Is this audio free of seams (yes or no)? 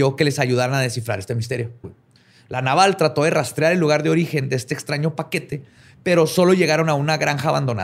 no